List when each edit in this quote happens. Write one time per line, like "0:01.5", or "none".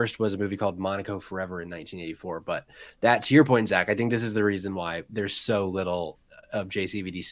none